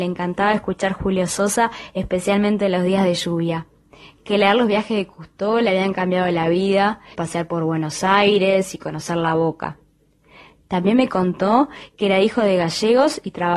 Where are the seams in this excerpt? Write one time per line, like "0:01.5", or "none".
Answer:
0:07.1